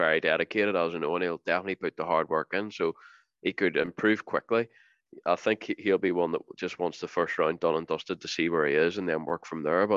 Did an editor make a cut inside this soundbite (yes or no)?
no